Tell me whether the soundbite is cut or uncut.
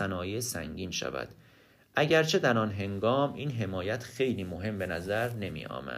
uncut